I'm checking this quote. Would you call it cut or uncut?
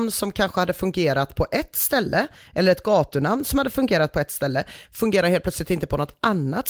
uncut